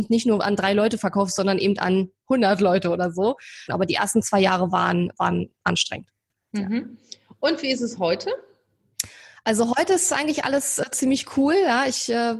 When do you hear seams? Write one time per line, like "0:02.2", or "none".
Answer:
0:03.7